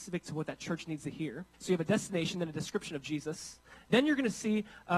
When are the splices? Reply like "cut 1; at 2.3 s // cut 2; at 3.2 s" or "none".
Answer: cut 1; at 1.5 s